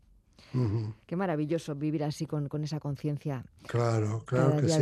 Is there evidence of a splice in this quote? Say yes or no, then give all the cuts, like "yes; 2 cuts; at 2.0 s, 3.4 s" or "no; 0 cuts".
no; 0 cuts